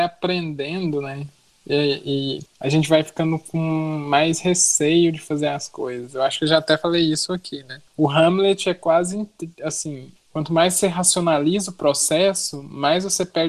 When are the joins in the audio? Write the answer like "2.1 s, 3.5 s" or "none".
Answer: 2.5 s, 7.9 s, 10.2 s